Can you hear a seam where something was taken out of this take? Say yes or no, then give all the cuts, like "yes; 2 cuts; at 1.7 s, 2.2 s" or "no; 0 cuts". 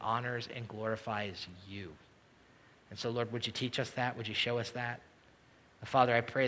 no; 0 cuts